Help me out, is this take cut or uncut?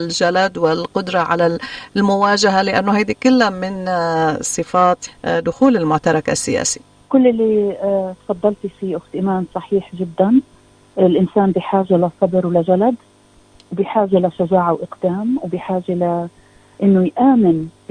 uncut